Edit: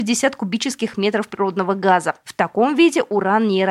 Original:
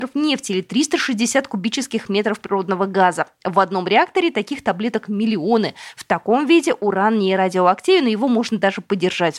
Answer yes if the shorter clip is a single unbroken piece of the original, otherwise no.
no